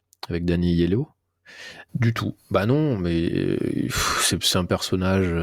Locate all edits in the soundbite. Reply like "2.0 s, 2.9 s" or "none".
1.9 s

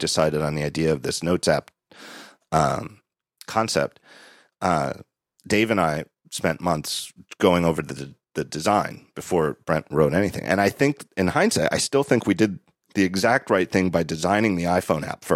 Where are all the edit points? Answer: none

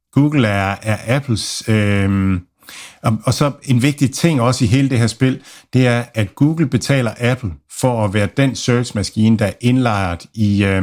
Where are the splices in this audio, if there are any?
none

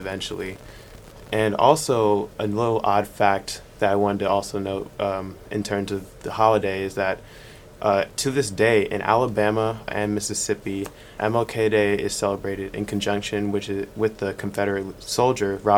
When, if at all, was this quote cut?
9.9 s, 11.2 s

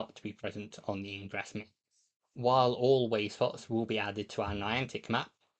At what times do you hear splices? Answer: 2.2 s

